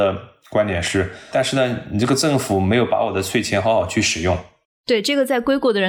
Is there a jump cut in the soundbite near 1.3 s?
yes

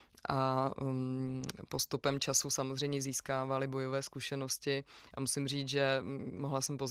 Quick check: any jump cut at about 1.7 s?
no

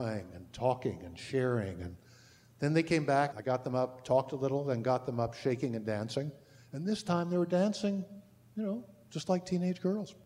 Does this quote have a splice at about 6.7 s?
no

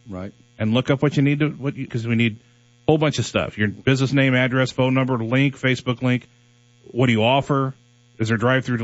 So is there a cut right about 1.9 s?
yes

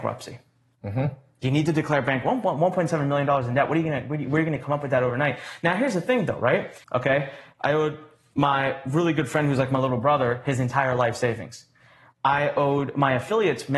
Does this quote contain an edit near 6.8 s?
yes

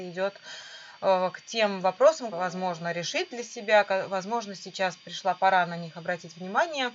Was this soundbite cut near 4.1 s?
no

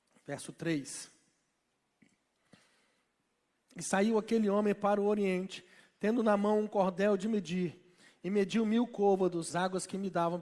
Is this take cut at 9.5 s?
yes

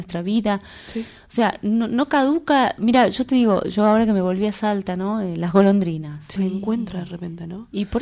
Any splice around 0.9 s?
no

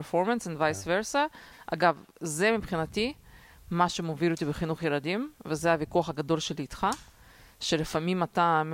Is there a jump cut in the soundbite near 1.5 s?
yes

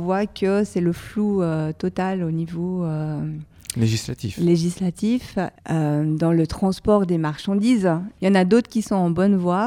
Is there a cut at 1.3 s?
no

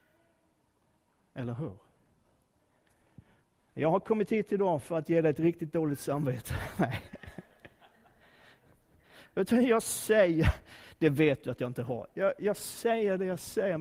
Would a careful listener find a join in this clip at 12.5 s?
no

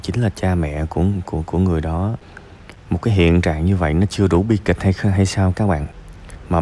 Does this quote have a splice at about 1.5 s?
yes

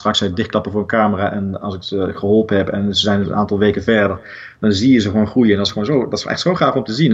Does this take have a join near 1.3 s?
no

